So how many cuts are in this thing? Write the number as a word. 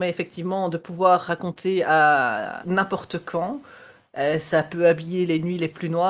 one